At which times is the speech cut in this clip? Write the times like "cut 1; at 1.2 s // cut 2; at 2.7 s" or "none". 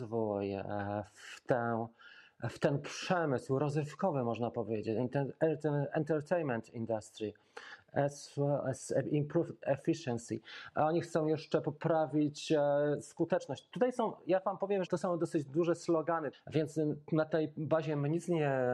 cut 1; at 14.9 s // cut 2; at 16.3 s

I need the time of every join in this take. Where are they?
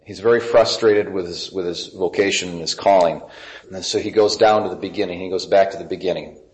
cut 1; at 3.6 s

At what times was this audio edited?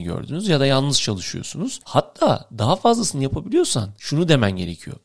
cut 1; at 1.8 s

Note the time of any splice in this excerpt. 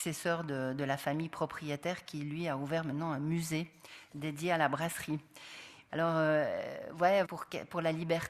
cut 1; at 5.9 s // cut 2; at 7.2 s

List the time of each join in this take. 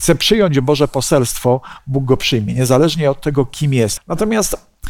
cut 1; at 4.0 s

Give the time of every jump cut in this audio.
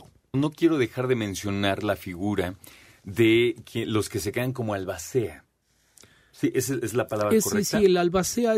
none

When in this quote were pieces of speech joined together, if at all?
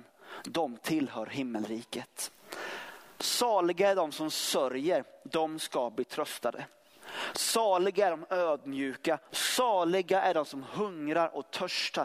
cut 1; at 9.3 s

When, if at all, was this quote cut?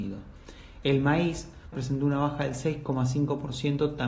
cut 1; at 1.7 s

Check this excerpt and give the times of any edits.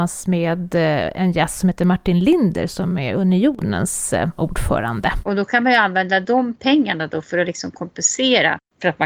cut 1; at 5.3 s

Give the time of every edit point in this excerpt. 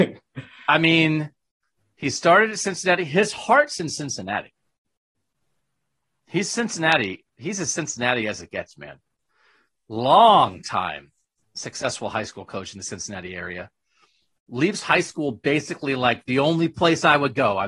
none

